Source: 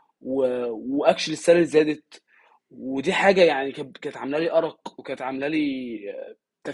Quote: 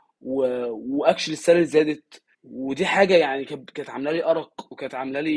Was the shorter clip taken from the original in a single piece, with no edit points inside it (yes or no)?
no